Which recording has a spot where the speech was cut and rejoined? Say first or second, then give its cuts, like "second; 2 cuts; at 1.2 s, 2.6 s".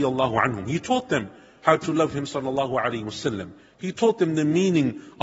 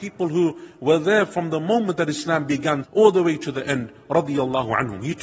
second; 1 cut; at 2.8 s